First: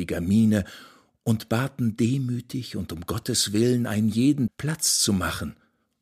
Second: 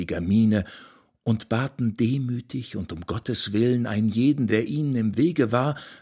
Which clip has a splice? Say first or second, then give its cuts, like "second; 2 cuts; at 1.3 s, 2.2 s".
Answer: first; 1 cut; at 4.5 s